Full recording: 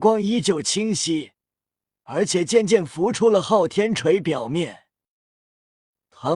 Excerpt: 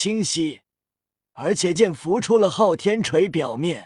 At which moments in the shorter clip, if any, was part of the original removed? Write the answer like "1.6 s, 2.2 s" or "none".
1.8 s